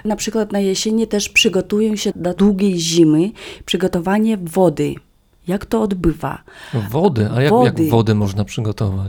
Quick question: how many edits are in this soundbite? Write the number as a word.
zero